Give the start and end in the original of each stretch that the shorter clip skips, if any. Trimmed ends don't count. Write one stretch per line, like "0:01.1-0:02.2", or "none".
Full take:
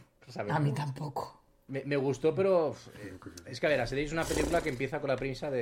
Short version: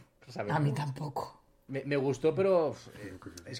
none